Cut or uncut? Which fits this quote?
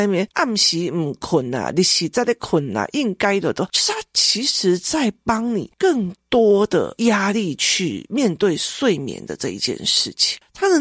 uncut